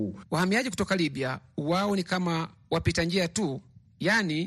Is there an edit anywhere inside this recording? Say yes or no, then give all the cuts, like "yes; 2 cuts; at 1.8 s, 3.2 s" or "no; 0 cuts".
no; 0 cuts